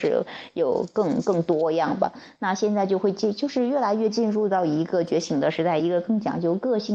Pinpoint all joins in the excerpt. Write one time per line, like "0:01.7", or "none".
0:05.8